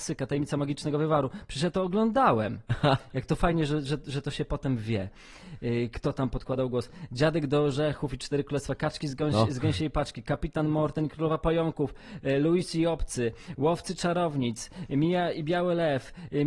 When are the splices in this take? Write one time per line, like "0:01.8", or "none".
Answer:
none